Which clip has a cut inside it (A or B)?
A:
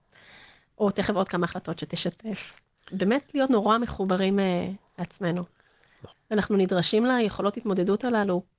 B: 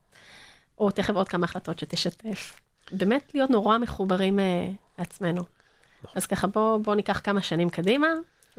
A